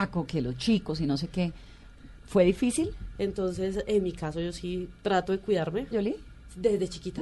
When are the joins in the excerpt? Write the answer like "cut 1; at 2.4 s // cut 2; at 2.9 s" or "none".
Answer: cut 1; at 3.1 s // cut 2; at 5.9 s